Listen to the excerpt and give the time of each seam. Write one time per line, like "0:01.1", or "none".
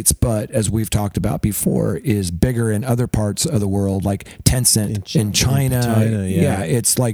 none